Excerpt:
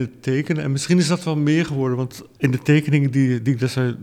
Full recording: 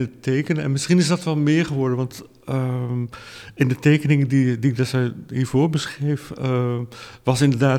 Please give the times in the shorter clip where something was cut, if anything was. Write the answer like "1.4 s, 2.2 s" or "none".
2.4 s